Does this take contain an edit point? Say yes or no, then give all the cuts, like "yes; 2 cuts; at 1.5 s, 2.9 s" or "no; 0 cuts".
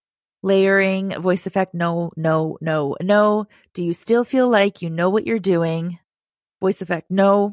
no; 0 cuts